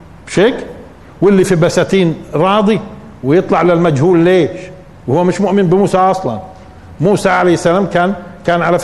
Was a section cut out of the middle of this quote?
no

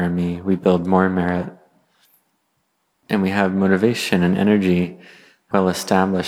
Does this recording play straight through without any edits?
yes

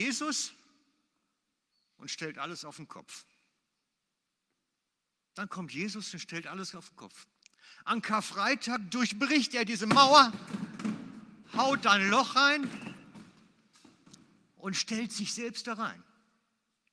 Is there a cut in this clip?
no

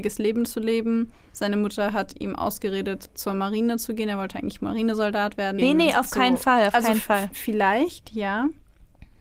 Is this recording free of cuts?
no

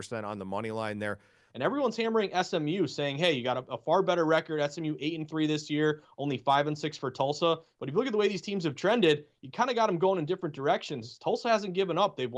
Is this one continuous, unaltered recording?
no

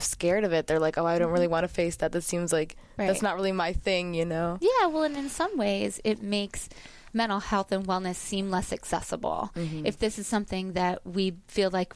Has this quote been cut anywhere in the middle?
no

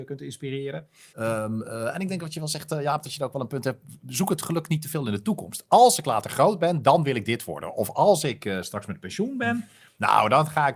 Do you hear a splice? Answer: yes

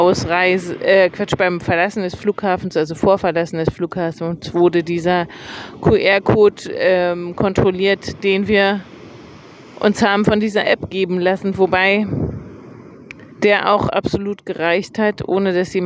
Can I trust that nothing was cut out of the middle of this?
no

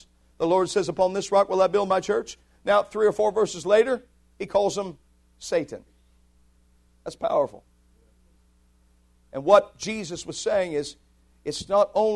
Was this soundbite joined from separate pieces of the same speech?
no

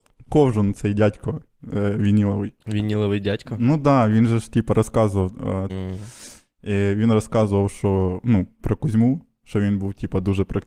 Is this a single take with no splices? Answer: no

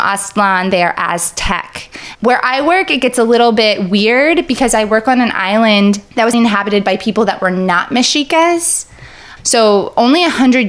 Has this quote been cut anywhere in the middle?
yes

